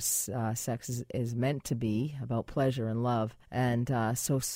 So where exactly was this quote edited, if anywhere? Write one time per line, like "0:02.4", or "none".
0:03.4